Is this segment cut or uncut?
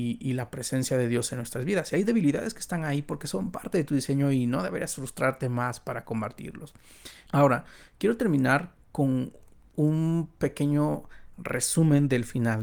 cut